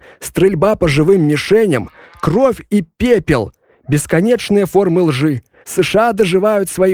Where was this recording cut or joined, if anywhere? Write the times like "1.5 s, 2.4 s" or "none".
5.6 s